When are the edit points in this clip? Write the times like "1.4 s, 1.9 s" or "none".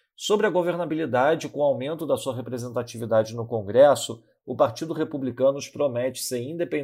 none